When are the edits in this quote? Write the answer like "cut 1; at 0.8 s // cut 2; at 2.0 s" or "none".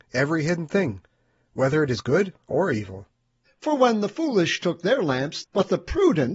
cut 1; at 3.5 s // cut 2; at 5.4 s